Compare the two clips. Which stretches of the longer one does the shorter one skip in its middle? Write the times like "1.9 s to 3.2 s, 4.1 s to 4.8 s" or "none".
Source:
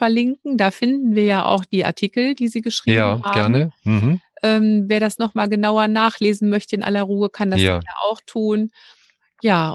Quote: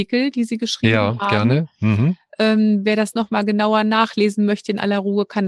none